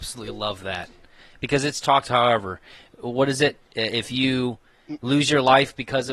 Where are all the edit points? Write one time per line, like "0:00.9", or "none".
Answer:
0:01.8